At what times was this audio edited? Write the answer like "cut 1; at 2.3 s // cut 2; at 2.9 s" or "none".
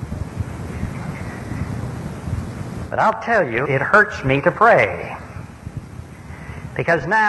cut 1; at 3.6 s